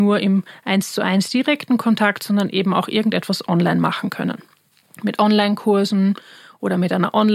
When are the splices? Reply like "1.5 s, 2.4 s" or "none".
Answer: none